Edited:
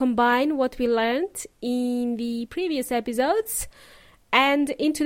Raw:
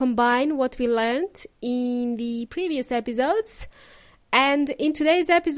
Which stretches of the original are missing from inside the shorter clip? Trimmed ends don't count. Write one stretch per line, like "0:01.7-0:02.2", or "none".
none